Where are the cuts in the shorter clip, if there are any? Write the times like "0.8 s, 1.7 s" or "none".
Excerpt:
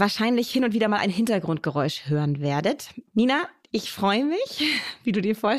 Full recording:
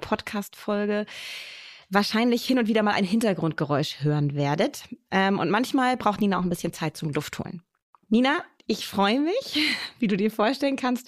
3.0 s